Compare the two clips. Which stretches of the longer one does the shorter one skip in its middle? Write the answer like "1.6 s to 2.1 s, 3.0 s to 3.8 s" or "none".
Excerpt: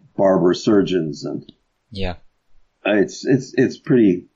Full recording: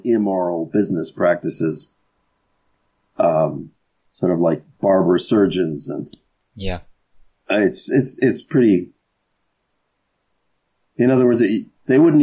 none